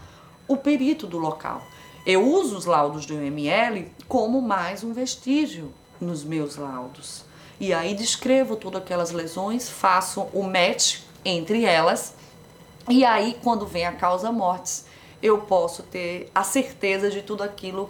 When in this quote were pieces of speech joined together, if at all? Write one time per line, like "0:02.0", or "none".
none